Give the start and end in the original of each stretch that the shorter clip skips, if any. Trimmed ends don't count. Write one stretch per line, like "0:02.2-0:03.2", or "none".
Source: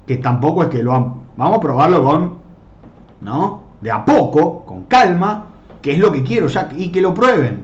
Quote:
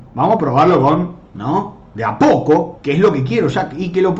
0:02.5-0:03.1
0:04.6-0:05.8

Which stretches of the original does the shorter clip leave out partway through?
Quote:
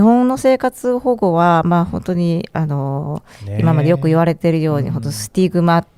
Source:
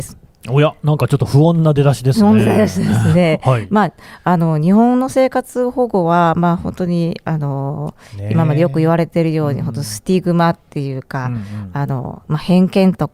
none

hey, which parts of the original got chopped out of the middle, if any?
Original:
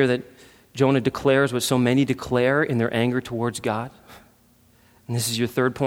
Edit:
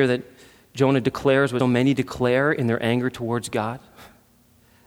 0:01.6-0:01.7

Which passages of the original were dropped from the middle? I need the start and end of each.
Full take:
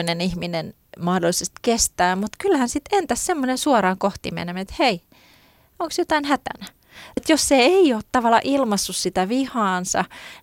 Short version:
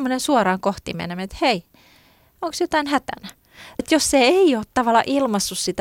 none

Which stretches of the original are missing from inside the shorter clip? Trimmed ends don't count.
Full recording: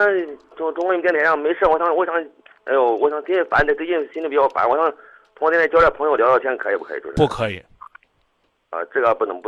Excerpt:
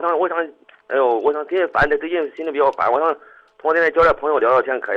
none

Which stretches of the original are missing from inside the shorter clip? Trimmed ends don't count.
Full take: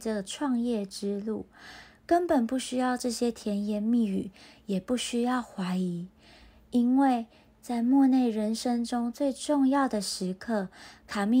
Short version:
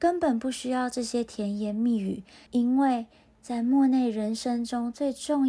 0:04.5-0:06.7

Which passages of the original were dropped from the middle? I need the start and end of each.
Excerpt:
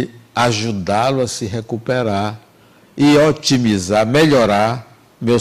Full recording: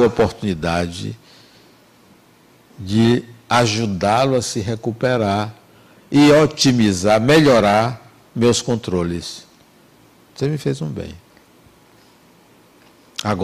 none

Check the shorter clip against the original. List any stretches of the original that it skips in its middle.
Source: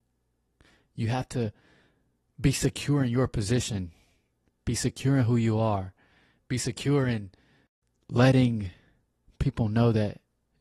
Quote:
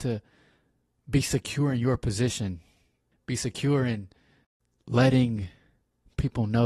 0:04.4-0:06.3

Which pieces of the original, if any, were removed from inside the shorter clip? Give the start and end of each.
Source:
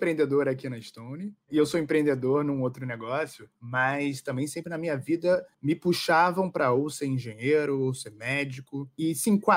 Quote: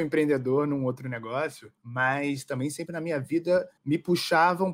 none

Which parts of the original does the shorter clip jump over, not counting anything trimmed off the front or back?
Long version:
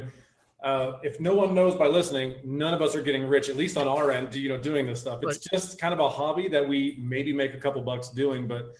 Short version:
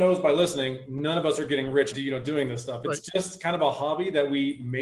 0:03.5-0:04.3

